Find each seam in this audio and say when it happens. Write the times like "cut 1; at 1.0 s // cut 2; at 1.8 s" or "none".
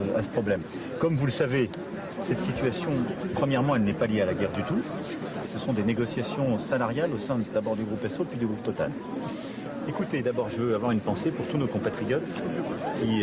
cut 1; at 5.4 s // cut 2; at 9.9 s